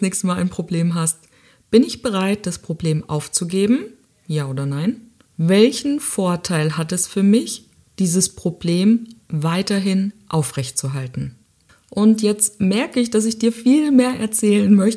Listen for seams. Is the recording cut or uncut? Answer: uncut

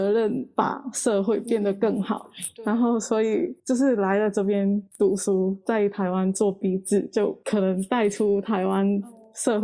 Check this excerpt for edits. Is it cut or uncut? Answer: cut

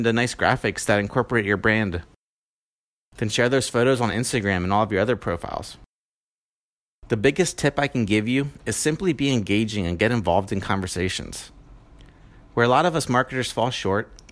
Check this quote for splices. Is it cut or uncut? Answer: uncut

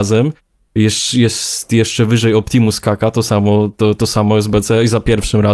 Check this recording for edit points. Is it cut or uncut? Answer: uncut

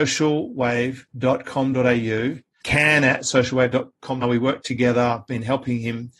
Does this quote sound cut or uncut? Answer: cut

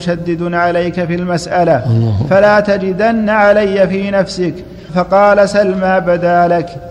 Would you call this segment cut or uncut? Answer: cut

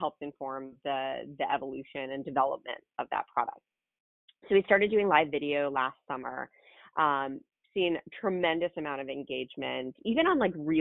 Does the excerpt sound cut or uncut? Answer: uncut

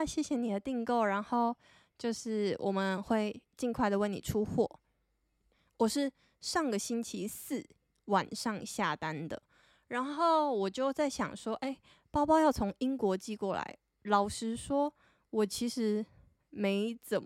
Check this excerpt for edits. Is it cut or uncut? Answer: uncut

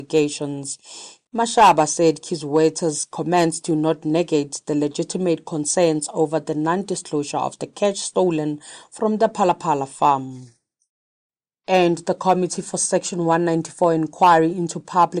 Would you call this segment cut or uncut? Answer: cut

